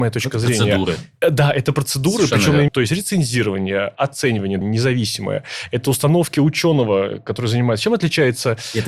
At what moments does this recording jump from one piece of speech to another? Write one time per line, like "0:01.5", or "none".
0:02.7
0:04.6